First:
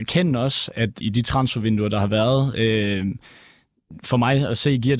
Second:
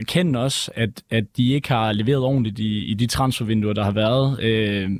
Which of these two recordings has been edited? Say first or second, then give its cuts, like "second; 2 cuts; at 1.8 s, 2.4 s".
first; 1 cut; at 1.0 s